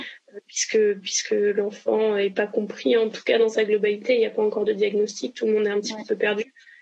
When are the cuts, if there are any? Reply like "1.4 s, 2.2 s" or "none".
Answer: none

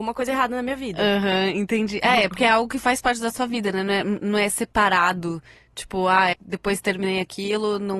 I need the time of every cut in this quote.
6.3 s

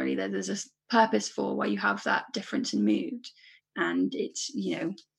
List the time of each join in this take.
3.6 s

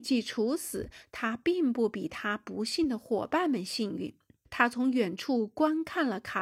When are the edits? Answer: 4.4 s

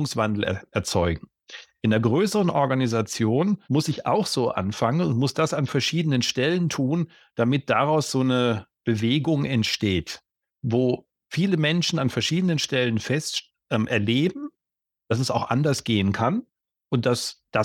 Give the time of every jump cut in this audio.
3.6 s

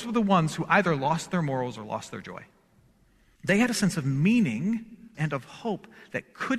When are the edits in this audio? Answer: 3.4 s, 5.1 s

